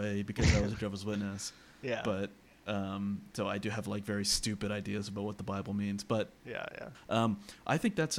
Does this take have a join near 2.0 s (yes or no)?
no